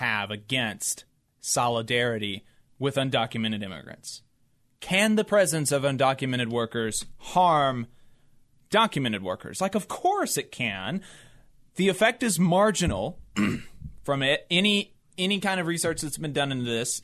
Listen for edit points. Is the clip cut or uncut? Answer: uncut